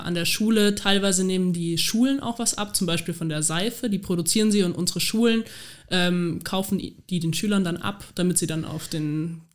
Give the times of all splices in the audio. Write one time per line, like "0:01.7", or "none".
none